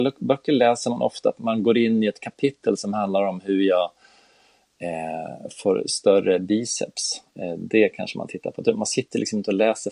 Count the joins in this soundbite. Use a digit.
1